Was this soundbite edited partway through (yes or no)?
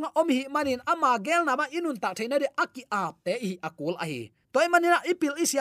yes